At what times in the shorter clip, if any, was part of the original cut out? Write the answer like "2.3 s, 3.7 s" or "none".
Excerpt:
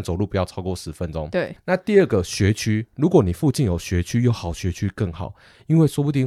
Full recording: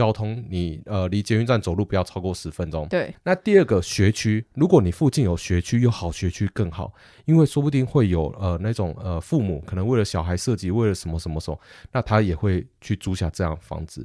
none